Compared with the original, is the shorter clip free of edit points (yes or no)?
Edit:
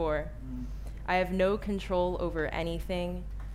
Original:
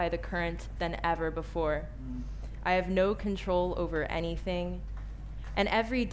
yes